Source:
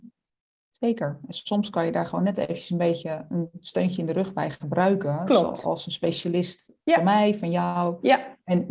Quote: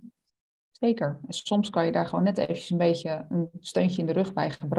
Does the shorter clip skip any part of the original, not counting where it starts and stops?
no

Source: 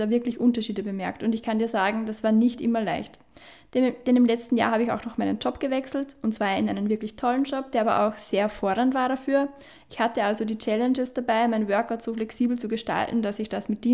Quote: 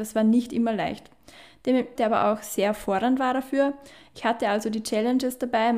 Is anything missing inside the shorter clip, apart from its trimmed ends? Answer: yes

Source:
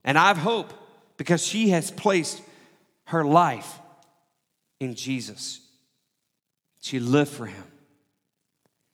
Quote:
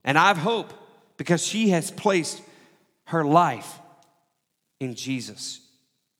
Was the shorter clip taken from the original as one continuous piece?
yes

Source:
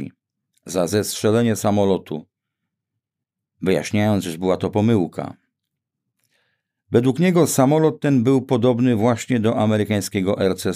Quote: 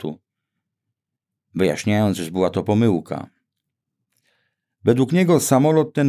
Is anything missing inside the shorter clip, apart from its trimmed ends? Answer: no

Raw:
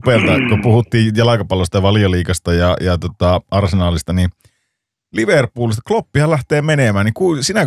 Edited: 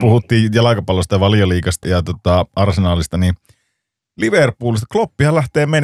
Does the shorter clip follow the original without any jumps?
no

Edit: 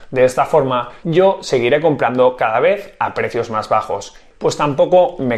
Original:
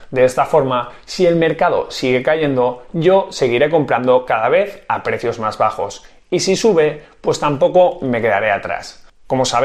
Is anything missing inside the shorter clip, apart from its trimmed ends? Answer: yes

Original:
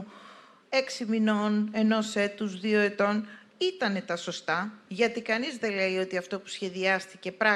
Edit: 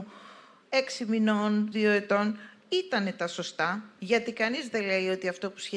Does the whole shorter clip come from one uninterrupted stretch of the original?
no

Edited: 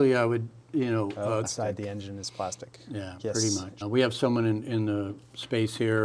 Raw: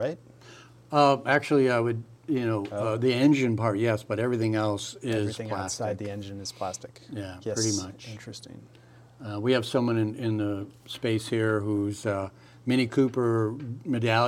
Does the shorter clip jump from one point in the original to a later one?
yes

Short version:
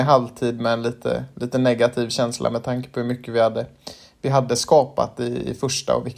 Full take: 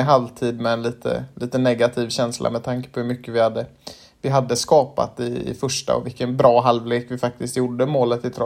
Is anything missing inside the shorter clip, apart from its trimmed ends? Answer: no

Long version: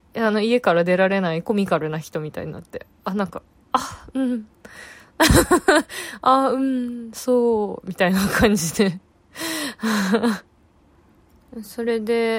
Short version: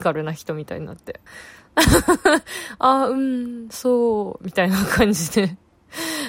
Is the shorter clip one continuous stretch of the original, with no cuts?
no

